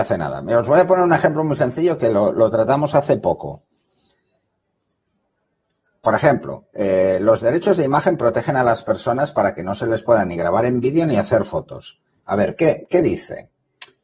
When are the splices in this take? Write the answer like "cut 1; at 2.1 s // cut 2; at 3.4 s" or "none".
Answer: cut 1; at 12.2 s

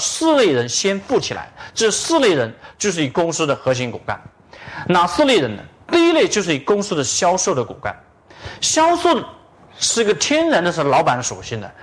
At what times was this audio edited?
none

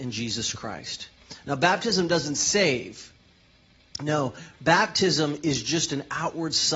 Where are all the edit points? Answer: none

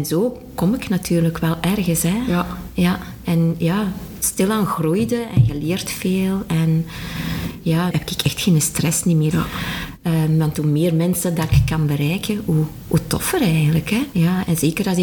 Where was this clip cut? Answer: cut 1; at 7.9 s // cut 2; at 9.3 s // cut 3; at 14.1 s

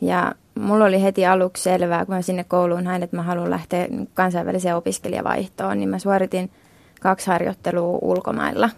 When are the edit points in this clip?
none

